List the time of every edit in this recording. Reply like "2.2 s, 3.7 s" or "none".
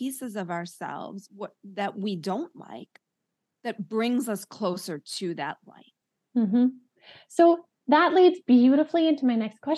none